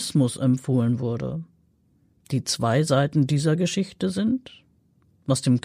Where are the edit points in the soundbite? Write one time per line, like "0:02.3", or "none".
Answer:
none